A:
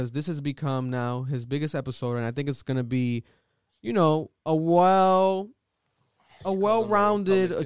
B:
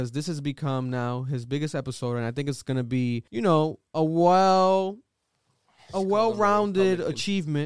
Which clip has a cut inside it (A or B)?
B